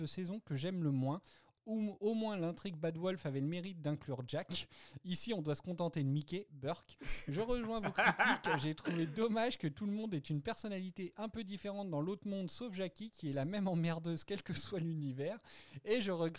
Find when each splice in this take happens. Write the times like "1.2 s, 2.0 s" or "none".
none